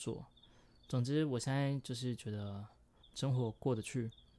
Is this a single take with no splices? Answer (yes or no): no